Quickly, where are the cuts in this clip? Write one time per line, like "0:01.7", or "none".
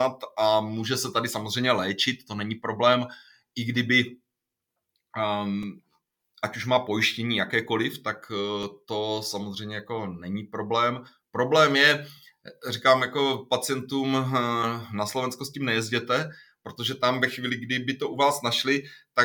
none